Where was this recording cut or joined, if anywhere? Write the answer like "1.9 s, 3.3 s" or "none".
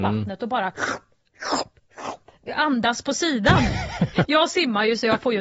4.2 s

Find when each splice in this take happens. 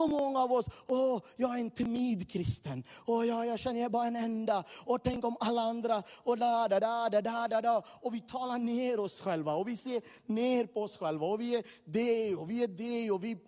none

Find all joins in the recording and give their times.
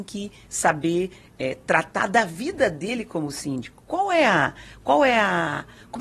none

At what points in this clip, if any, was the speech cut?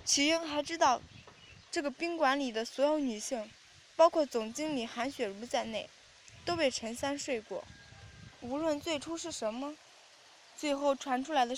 8.4 s

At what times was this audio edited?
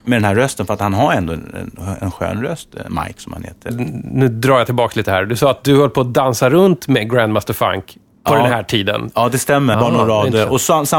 9.7 s

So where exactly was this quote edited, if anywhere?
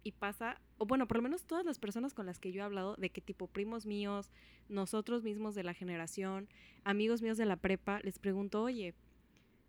none

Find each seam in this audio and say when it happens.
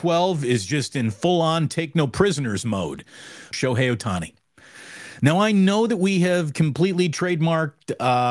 3.5 s

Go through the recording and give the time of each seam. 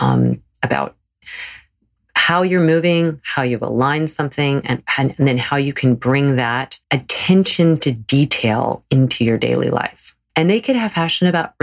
6.8 s, 10.3 s

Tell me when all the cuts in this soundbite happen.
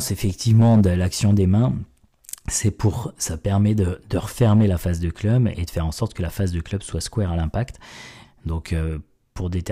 8.2 s

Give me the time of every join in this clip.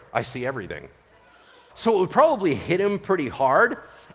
1.7 s

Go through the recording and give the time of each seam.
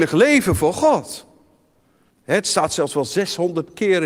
2.1 s

